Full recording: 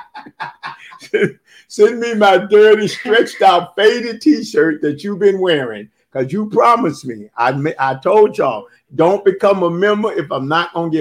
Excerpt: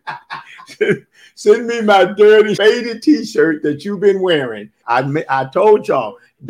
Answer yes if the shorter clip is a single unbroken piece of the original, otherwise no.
no